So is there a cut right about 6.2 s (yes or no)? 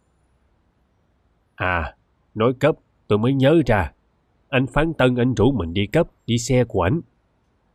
yes